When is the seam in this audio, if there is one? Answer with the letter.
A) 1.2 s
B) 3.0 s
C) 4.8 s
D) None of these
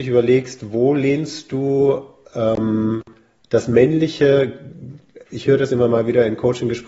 D